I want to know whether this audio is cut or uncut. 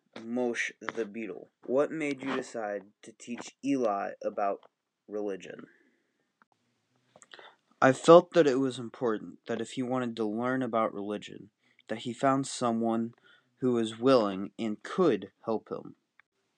cut